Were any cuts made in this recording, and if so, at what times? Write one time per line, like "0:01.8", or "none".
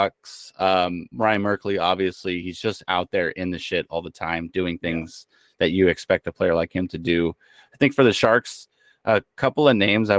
none